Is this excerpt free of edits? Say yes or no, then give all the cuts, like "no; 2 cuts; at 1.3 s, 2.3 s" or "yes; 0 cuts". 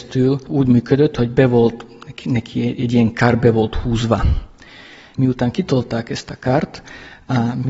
no; 1 cut; at 5.1 s